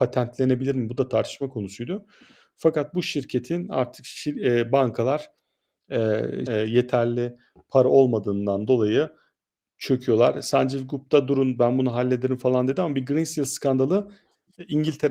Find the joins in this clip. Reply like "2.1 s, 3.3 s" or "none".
6.5 s